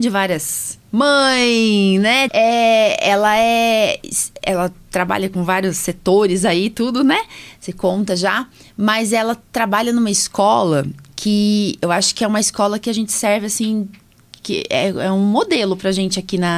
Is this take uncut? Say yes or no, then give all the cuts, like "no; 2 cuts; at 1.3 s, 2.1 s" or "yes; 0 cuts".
no; 1 cut; at 2.3 s